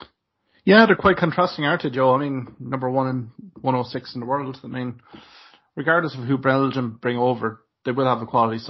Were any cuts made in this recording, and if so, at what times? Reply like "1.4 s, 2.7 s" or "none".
none